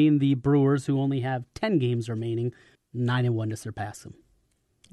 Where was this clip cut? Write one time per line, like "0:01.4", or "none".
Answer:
0:02.7